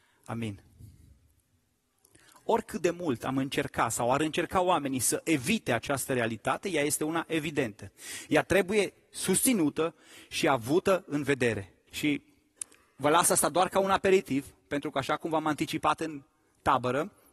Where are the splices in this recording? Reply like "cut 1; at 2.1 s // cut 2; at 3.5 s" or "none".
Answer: cut 1; at 11.9 s